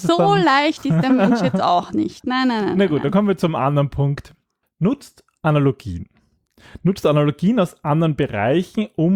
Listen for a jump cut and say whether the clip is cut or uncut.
cut